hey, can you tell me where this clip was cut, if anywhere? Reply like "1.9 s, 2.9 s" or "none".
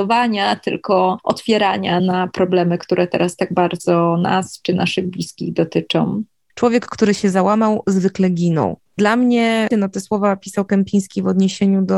6.5 s, 9.7 s